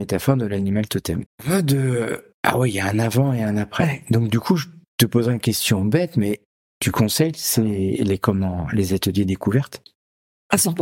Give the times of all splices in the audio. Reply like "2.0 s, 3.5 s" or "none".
1.3 s